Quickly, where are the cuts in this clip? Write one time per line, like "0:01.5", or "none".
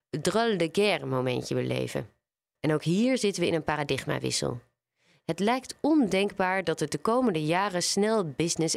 0:02.6